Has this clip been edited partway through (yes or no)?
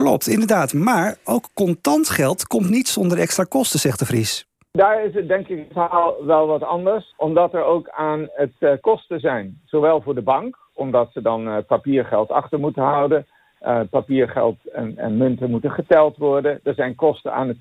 yes